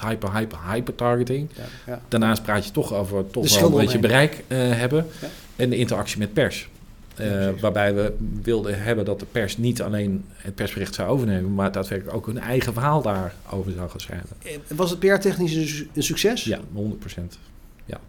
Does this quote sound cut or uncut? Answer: uncut